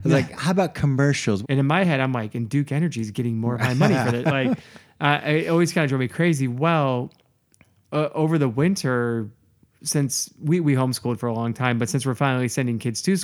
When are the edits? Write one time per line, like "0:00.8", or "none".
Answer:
0:01.4